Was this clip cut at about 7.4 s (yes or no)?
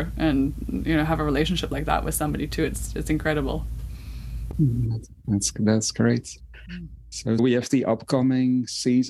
yes